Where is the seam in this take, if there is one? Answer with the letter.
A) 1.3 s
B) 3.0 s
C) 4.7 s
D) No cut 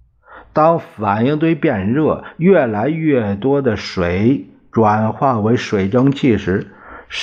D